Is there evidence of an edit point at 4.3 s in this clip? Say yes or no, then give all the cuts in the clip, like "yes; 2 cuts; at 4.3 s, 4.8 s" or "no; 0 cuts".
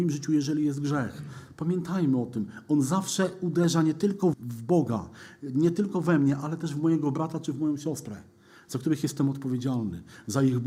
yes; 1 cut; at 4.3 s